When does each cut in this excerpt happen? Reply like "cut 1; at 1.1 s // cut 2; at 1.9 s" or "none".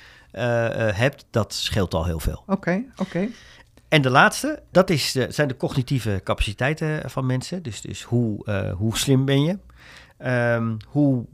cut 1; at 4.7 s

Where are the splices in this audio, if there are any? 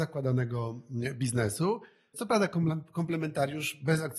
cut 1; at 2.1 s

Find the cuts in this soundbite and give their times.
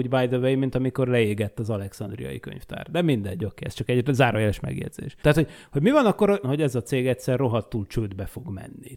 cut 1; at 5.2 s // cut 2; at 6.4 s

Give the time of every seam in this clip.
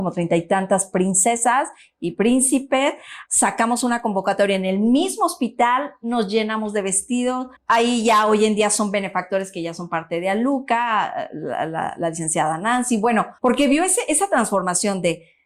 cut 1; at 3.3 s // cut 2; at 7.6 s // cut 3; at 13.4 s

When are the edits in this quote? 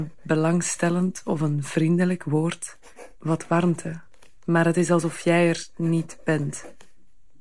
none

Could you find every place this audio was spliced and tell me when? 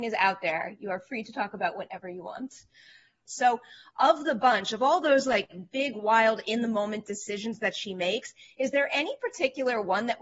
cut 1; at 3.3 s

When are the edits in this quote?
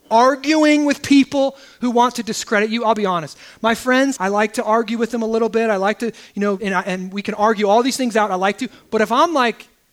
cut 1; at 4.2 s // cut 2; at 6.6 s

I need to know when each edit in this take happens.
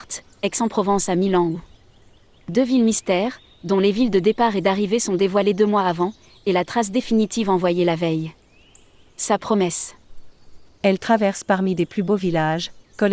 none

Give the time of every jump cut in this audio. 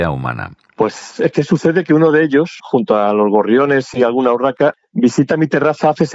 cut 1; at 2.6 s

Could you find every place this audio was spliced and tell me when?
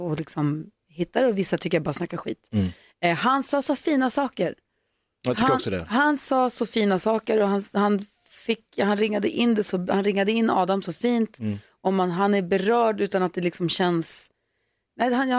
none

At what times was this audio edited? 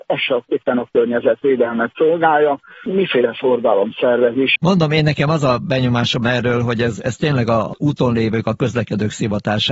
cut 1; at 4.6 s

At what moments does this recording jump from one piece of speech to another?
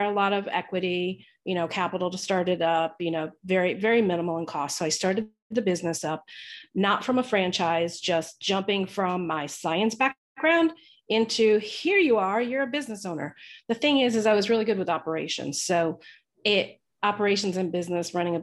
none

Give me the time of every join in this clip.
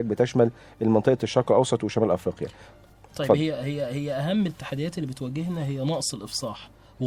none

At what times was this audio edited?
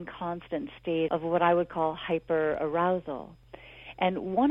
cut 1; at 1.1 s

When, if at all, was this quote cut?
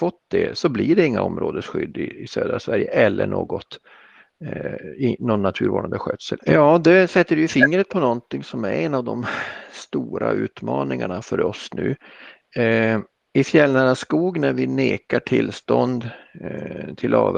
cut 1; at 6.4 s

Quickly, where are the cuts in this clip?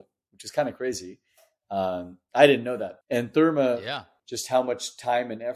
cut 1; at 3.0 s // cut 2; at 4.2 s

